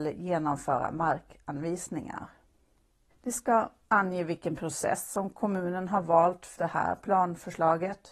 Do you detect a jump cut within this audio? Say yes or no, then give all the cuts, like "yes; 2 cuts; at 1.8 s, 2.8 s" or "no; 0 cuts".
yes; 2 cuts; at 3.1 s, 6.6 s